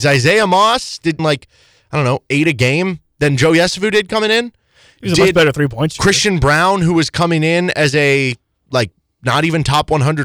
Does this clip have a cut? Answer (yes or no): yes